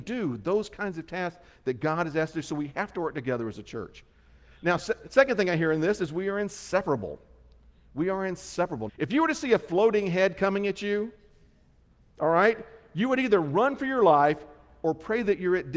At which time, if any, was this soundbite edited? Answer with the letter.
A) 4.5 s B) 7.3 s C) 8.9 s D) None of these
C